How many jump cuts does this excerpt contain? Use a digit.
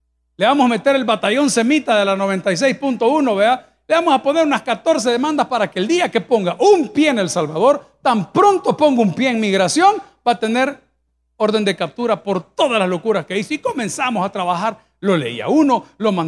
0